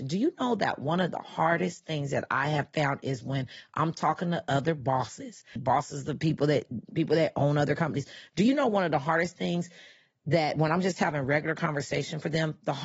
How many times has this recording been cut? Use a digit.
1